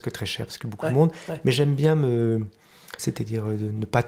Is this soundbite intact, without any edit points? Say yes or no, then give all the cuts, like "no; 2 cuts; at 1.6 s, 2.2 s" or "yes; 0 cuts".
no; 1 cut; at 3.0 s